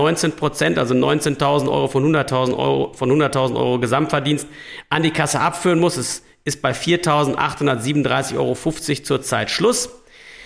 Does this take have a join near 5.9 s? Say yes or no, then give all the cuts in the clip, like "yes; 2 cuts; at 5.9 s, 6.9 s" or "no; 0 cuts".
no; 0 cuts